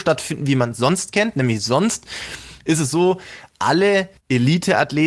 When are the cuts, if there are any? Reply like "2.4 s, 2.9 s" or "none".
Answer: 4.2 s